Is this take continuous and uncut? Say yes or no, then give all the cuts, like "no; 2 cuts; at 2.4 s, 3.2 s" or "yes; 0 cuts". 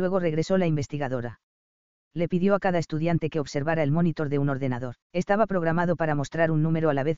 no; 1 cut; at 5.0 s